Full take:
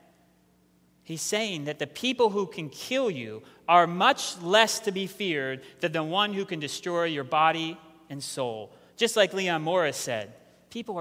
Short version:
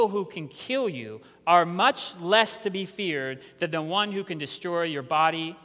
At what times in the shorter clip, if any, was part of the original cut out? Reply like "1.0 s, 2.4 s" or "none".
none